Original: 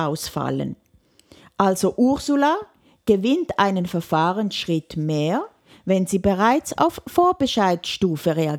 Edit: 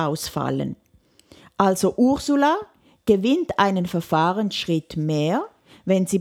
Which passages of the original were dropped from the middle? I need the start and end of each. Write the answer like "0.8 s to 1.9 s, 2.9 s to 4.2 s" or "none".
none